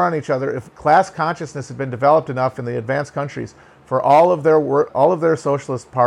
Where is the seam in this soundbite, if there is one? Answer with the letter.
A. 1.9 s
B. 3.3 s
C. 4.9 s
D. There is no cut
C